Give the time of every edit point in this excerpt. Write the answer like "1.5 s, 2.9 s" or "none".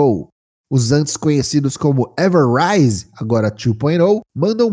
none